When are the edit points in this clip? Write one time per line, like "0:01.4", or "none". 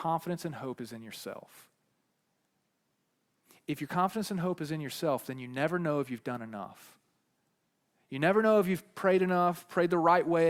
none